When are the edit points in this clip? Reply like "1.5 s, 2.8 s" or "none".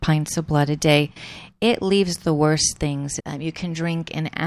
3.2 s